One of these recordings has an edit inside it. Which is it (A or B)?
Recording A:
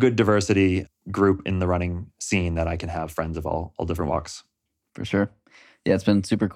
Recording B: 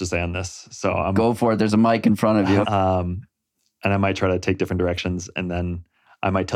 B